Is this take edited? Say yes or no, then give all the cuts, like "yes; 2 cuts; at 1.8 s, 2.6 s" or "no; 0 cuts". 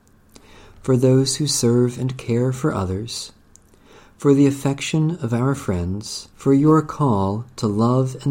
yes; 1 cut; at 6.3 s